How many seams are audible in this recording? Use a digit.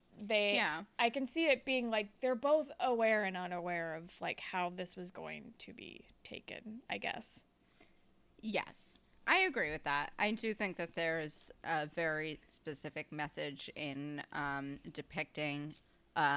0